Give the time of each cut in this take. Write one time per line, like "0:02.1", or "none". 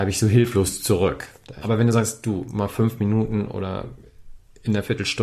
0:01.6